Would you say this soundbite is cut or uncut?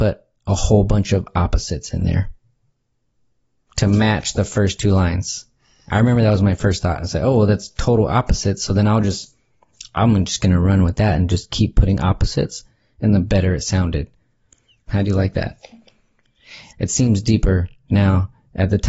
cut